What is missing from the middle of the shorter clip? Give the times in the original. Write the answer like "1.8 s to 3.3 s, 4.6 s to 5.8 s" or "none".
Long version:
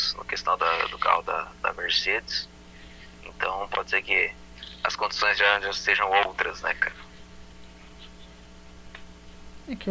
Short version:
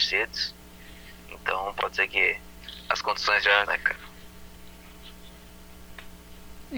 5.6 s to 6.6 s